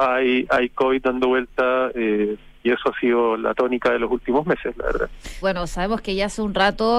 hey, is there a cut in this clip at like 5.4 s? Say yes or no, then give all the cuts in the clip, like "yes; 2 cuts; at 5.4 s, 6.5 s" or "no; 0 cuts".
yes; 1 cut; at 5.4 s